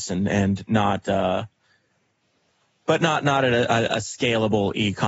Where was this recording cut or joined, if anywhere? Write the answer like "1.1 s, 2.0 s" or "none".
none